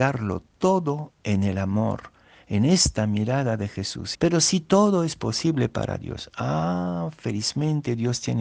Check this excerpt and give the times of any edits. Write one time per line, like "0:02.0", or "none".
0:04.1